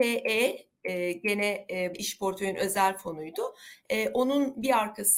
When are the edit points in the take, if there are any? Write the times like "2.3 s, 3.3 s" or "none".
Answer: 1.9 s